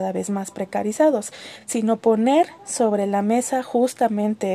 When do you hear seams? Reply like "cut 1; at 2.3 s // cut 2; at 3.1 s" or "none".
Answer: none